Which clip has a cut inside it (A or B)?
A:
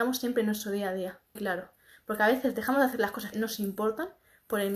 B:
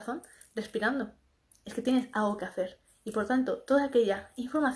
A